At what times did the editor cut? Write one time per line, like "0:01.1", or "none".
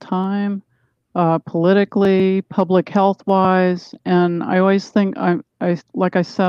none